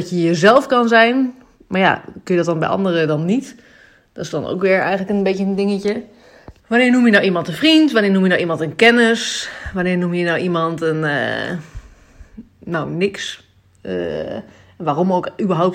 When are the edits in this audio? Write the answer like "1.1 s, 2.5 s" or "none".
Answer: 6.6 s